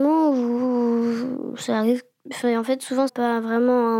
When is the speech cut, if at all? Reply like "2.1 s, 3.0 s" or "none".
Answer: 3.1 s